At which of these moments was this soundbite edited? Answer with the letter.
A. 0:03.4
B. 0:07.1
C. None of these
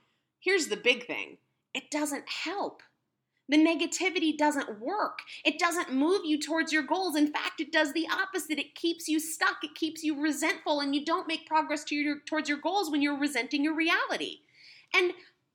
C